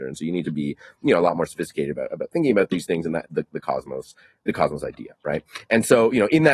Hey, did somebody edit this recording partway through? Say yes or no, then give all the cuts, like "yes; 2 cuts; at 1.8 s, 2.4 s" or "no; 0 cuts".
yes; 1 cut; at 3.2 s